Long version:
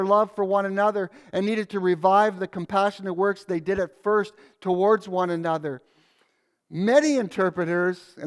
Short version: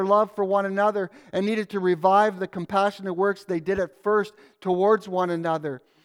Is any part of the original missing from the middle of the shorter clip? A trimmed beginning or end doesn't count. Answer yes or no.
no